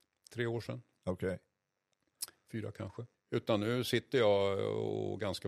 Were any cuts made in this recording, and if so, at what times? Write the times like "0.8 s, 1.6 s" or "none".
3.1 s